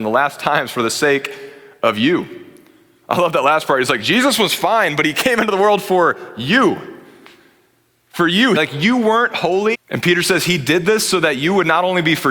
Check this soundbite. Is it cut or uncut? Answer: cut